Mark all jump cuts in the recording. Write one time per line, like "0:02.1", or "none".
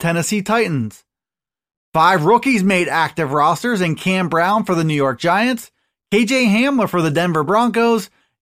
none